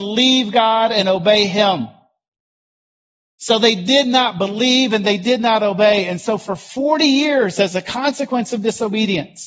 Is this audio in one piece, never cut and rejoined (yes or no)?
yes